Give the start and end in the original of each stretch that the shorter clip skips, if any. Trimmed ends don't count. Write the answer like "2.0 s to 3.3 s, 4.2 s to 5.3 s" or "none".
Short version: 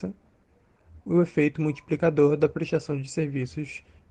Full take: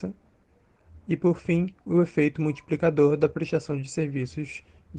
1.0 s to 1.8 s